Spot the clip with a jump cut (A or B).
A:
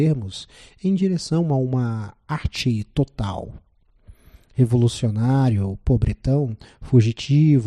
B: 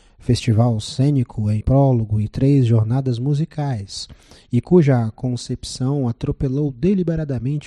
B